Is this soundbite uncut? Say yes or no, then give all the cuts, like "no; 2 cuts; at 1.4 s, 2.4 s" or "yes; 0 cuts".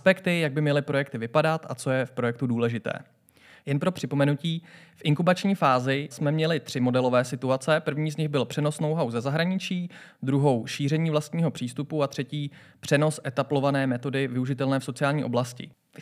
no; 1 cut; at 6.1 s